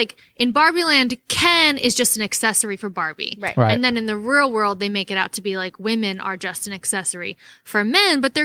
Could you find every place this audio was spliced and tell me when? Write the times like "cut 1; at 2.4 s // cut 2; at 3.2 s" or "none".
none